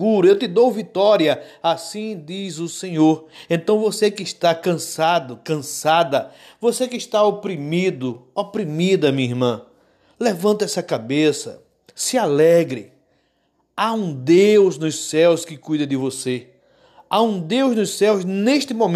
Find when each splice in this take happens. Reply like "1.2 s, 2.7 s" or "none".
none